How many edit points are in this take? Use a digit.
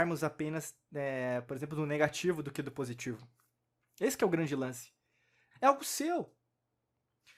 1